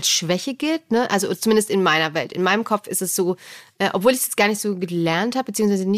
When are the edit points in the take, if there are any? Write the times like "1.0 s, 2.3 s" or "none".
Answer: none